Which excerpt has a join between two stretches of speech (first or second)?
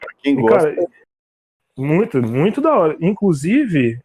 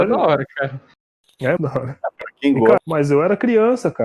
second